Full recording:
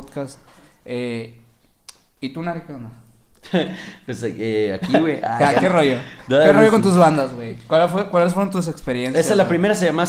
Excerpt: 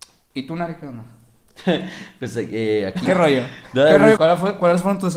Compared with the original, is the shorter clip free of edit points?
no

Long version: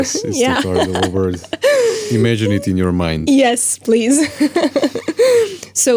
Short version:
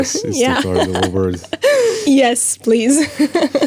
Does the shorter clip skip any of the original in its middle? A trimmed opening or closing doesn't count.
yes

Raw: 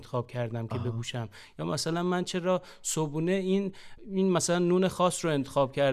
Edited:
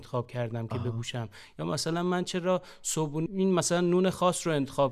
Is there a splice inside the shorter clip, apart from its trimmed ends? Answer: yes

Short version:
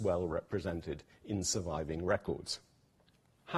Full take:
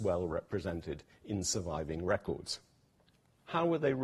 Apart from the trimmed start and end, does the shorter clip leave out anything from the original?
no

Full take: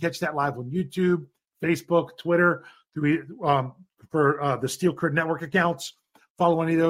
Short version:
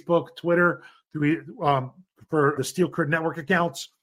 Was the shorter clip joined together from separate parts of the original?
yes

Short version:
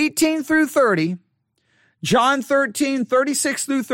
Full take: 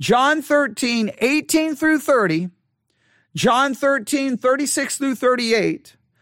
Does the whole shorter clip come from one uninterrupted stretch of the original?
yes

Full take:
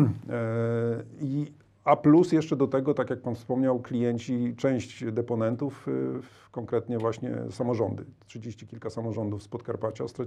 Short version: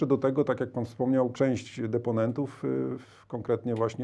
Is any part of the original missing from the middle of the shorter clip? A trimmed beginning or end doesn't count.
yes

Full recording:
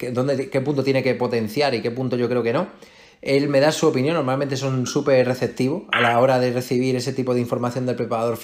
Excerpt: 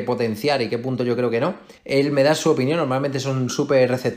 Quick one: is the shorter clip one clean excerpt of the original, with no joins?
no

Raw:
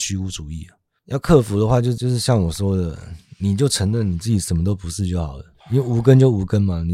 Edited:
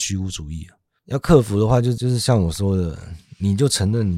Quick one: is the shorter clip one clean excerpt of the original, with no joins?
yes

